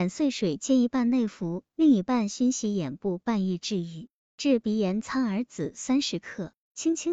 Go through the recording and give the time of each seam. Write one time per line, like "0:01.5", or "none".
0:04.2